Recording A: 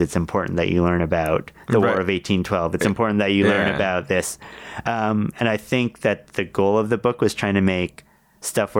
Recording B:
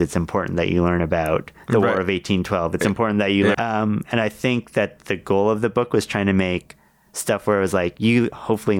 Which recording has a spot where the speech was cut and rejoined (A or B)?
B